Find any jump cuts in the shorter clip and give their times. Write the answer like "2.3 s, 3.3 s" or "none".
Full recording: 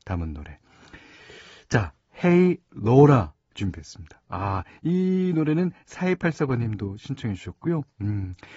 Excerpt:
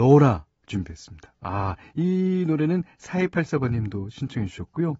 none